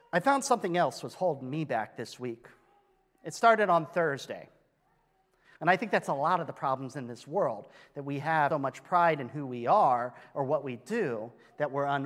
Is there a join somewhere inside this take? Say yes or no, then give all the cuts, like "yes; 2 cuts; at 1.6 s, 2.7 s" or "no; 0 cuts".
yes; 2 cuts; at 5.4 s, 8.5 s